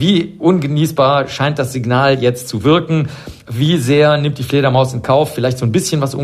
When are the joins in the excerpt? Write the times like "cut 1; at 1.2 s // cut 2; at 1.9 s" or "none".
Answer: none